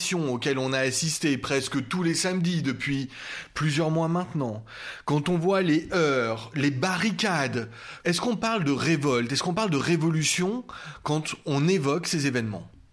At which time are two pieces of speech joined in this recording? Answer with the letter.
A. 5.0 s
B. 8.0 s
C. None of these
B